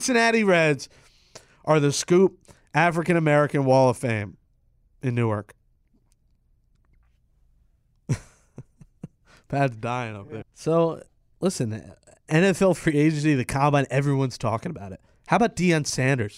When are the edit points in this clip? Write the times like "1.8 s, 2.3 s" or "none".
10.4 s

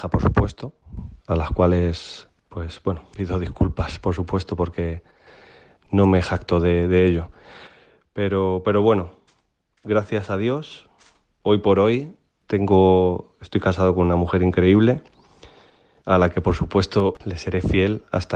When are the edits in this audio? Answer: none

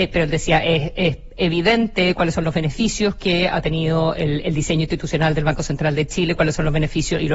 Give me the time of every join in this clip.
none

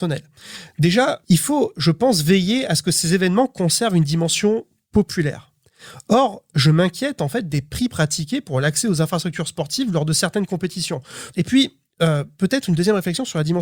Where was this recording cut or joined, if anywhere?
1.2 s, 11.3 s

